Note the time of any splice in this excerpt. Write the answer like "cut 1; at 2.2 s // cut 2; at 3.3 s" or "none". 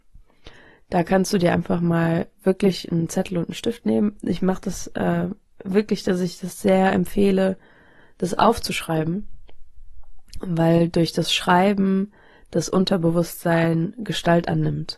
none